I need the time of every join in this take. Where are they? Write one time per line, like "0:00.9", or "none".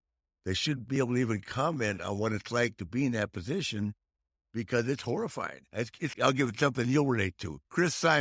0:06.1